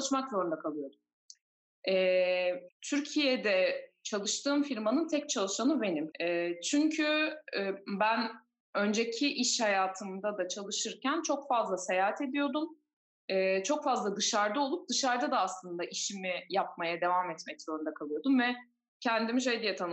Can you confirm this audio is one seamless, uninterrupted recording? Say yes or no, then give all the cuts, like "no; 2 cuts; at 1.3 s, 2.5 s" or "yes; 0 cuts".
no; 2 cuts; at 2.7 s, 6.1 s